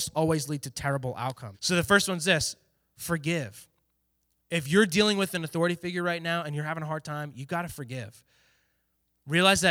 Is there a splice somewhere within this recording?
yes; 1 cut; at 1.5 s

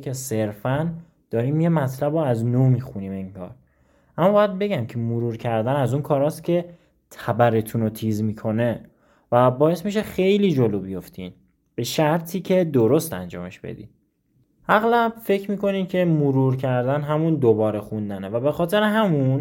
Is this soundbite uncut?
yes; 0 cuts

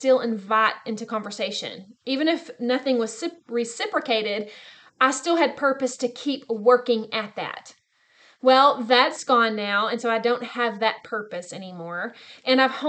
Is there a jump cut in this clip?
no; 0 cuts

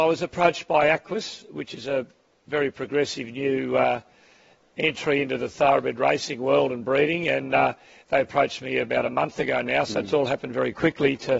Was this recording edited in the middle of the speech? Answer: no; 0 cuts

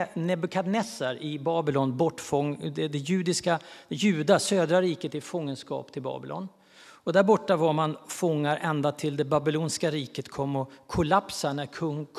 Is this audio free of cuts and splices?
yes; 0 cuts

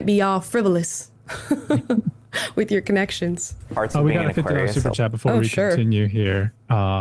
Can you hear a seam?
no; 0 cuts

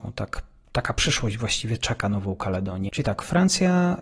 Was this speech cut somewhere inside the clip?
yes; 1 cut; at 2.9 s

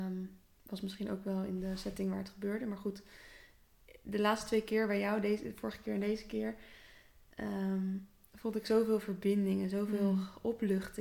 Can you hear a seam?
no; 0 cuts

